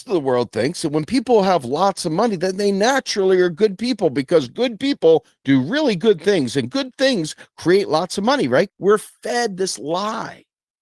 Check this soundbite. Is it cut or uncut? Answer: cut